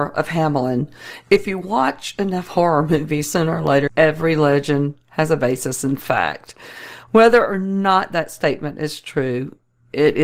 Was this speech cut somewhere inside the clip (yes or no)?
yes